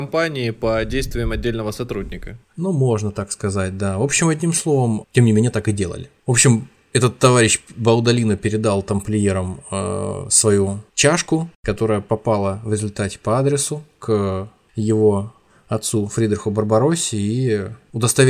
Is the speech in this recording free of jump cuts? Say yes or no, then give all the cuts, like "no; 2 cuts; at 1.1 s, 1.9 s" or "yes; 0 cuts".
yes; 0 cuts